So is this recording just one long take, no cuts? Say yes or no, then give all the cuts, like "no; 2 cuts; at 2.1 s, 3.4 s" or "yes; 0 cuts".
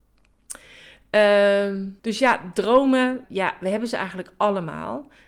no; 2 cuts; at 2.0 s, 3.2 s